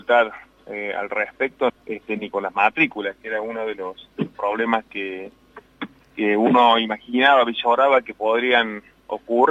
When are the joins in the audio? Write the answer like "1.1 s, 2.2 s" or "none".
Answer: 1.7 s